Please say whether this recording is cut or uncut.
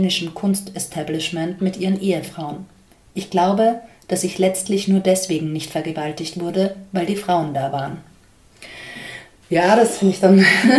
uncut